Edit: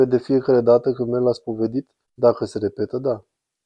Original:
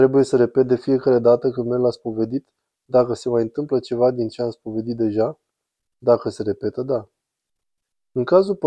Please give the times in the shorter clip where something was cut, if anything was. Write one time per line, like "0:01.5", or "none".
0:02.0